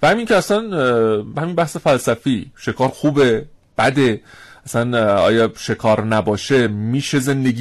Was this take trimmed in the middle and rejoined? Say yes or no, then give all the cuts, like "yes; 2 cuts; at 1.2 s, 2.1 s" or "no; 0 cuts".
no; 0 cuts